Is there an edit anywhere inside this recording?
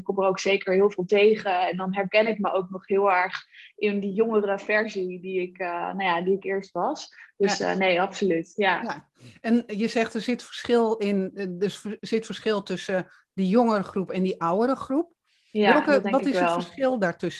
no; 0 cuts

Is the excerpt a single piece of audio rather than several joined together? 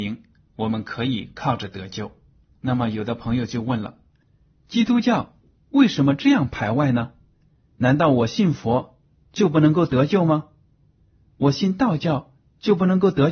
no; 1 cut; at 2.5 s

